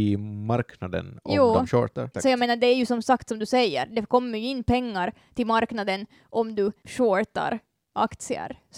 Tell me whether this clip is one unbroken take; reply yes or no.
no